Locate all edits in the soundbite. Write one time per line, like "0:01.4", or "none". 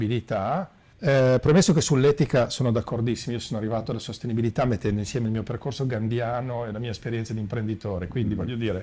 0:00.9

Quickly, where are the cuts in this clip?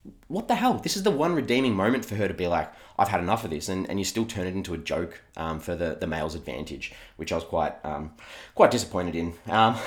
none

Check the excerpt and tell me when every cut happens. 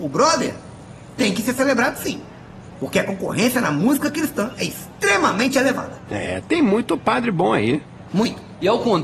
none

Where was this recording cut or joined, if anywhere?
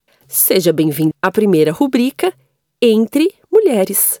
0:01.1

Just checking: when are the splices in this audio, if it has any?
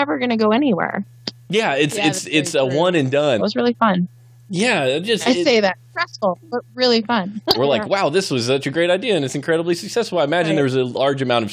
0:03.4
0:07.5

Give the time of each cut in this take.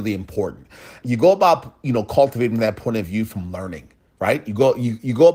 0:01.0

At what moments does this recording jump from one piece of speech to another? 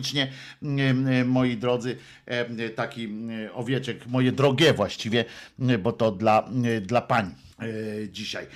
0:07.5

